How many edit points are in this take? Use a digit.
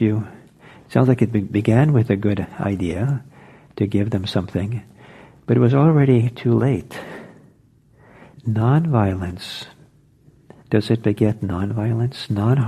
1